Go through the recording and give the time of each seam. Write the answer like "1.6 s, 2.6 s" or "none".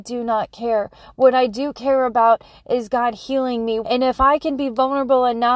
3.8 s